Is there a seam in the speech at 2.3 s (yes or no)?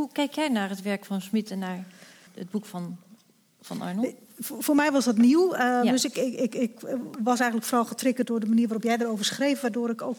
yes